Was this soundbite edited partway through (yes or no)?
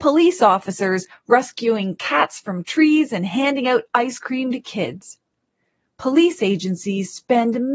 no